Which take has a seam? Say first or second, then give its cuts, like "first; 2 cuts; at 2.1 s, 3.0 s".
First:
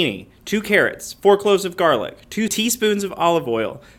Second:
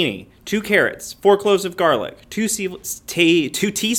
first; 1 cut; at 2.5 s